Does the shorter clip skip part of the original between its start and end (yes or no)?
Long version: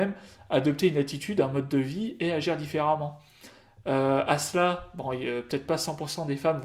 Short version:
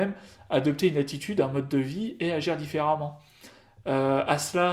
no